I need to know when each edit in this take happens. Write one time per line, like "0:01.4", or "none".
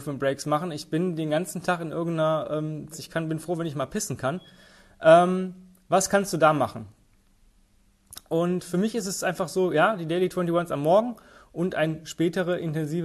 0:02.9

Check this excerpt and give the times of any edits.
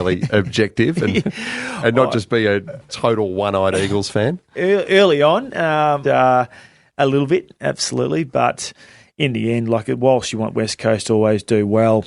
0:06.0

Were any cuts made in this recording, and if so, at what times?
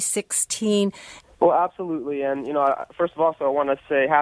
0:01.2

